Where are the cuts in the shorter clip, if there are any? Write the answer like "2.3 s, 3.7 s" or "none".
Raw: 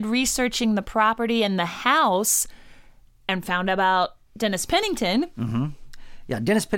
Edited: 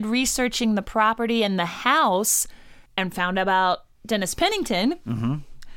2.9 s